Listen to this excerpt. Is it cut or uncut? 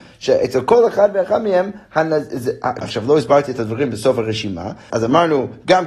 cut